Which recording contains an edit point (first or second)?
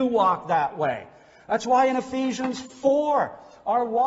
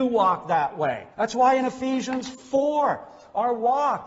second